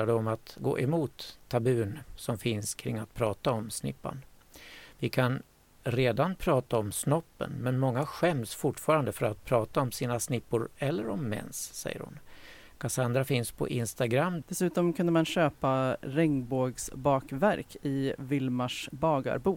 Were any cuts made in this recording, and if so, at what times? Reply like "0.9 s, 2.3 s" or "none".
14.4 s